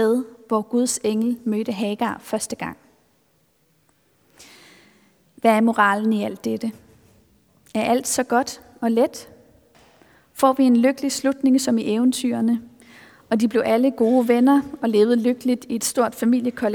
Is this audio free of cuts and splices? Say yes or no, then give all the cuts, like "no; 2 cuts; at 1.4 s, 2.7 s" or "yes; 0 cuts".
yes; 0 cuts